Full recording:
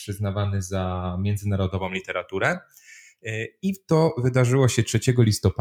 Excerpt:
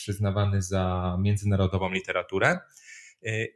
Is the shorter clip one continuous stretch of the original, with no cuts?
yes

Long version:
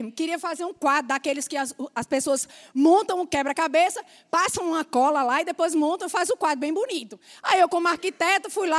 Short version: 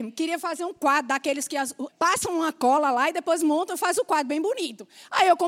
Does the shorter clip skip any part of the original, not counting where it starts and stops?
yes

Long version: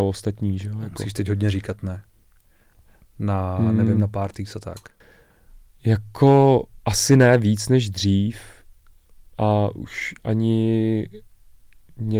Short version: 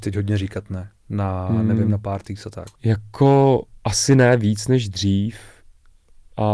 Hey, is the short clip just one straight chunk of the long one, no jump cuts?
no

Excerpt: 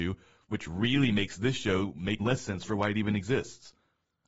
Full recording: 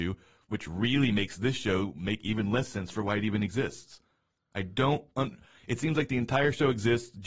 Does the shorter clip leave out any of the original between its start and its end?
yes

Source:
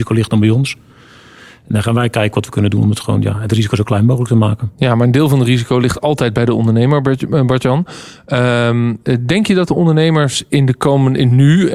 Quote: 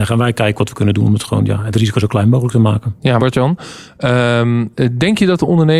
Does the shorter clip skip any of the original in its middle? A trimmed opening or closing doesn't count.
yes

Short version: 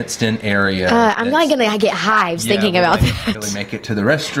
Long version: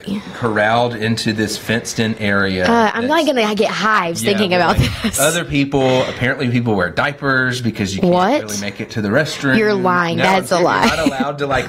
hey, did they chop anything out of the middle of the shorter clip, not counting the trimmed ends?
yes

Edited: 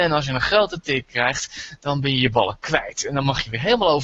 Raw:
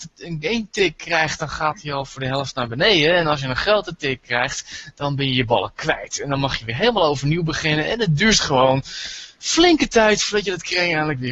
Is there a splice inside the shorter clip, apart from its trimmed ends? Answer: no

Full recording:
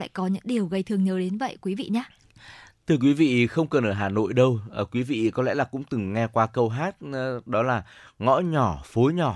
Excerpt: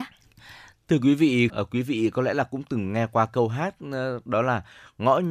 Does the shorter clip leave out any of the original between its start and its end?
yes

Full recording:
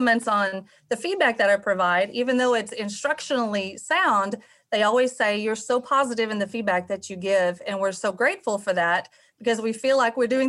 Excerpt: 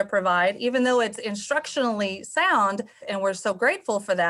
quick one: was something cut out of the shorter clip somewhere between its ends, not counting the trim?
yes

